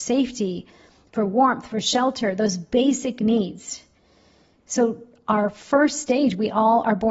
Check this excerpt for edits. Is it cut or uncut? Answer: uncut